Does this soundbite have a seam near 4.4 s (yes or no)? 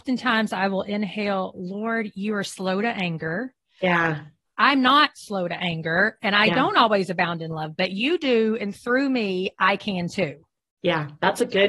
yes